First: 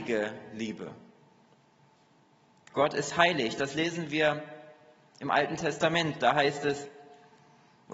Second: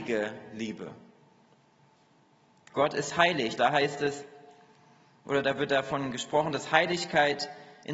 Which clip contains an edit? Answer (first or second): second